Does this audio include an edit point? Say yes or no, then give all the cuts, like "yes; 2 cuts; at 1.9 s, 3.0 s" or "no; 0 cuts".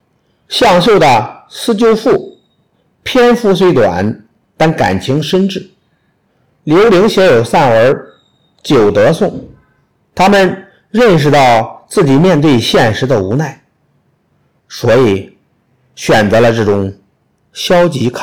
yes; 1 cut; at 10.0 s